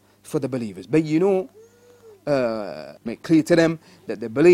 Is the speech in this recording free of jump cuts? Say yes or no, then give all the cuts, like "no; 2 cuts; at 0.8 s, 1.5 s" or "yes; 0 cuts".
no; 1 cut; at 3.0 s